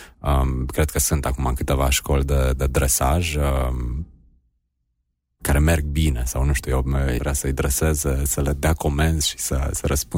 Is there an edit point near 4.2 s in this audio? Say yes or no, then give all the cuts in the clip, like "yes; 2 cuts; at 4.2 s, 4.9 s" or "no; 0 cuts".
no; 1 cut; at 7.2 s